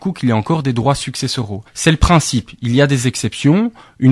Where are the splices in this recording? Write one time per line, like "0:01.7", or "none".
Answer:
none